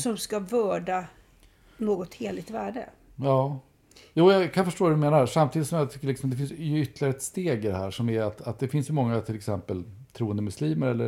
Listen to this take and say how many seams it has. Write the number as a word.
zero